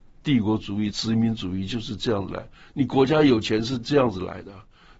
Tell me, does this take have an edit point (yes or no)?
no